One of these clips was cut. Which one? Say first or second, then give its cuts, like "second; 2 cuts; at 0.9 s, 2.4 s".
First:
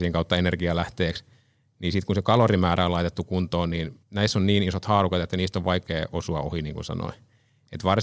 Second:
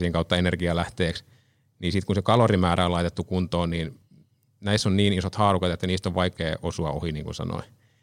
first; 1 cut; at 4.0 s